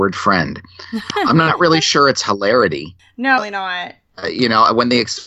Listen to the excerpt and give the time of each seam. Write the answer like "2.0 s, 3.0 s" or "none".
3.4 s

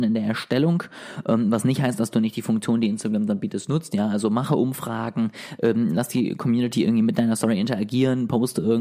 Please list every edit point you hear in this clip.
none

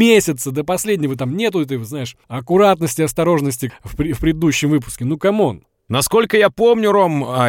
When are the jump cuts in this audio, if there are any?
2.2 s, 3.7 s

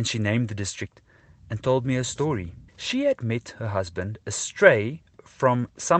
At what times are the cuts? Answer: 2.7 s

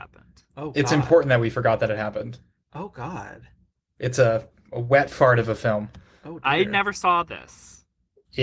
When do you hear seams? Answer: none

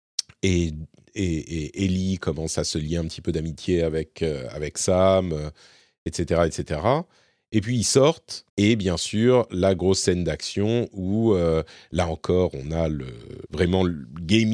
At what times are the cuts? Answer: 8.5 s, 13.5 s

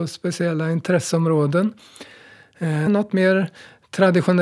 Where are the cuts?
2.9 s

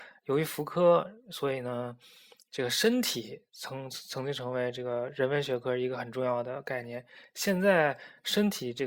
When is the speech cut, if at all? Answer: none

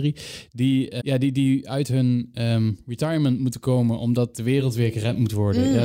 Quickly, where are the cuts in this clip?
1.0 s

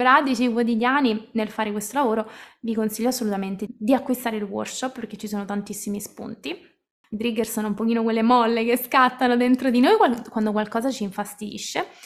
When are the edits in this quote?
3.7 s, 7.0 s

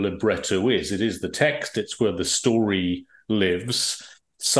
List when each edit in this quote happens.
none

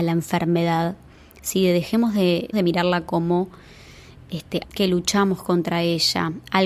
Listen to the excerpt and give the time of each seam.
2.5 s, 4.6 s

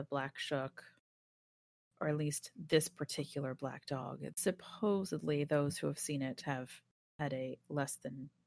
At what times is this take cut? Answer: none

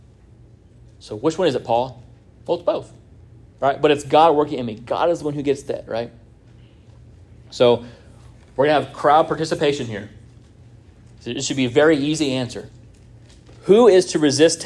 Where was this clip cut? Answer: 5.9 s

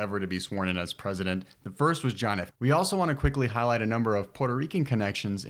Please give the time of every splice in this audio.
2.5 s

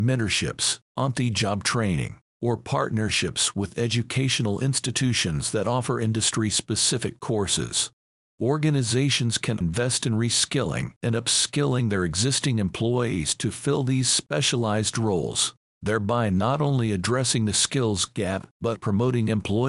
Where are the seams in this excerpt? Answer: 9.6 s, 18.8 s

